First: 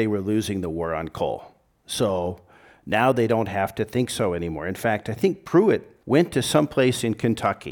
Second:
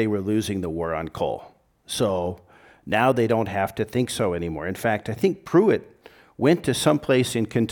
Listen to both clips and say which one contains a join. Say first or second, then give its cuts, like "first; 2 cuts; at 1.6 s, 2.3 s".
first; 1 cut; at 6.0 s